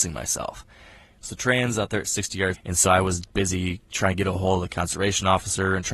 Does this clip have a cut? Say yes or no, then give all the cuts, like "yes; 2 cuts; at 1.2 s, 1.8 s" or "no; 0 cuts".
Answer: yes; 2 cuts; at 1.2 s, 2.5 s